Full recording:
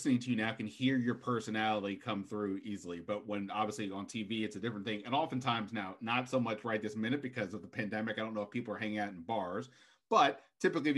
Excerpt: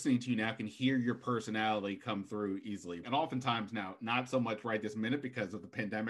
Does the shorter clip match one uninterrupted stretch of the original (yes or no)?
no